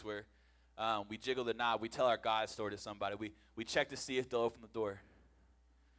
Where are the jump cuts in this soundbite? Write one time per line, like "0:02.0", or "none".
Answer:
none